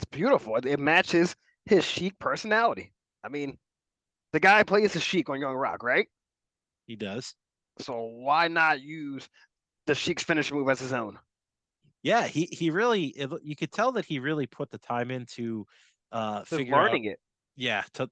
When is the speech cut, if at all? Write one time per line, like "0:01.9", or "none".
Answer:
none